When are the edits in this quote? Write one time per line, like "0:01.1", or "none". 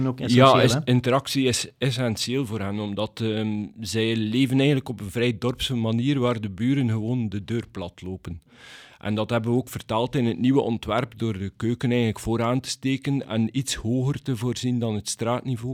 none